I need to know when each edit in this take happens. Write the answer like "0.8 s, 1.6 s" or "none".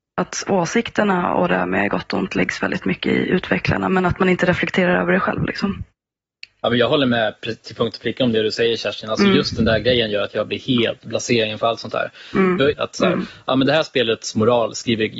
12.7 s